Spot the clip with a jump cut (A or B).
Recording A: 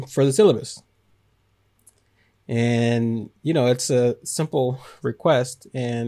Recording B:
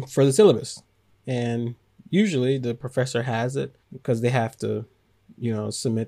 B